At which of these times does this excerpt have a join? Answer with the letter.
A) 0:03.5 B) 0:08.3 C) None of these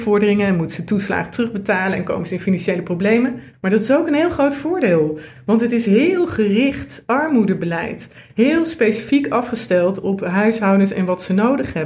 A